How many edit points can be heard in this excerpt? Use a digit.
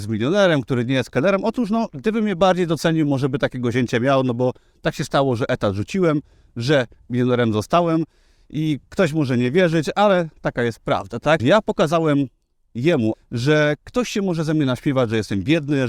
2